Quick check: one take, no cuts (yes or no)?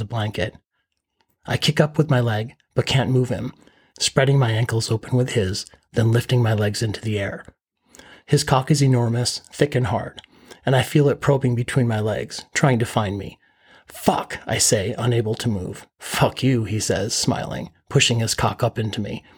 no